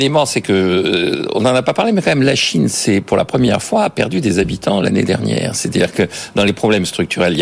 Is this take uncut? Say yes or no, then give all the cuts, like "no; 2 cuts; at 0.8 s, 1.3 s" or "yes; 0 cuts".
yes; 0 cuts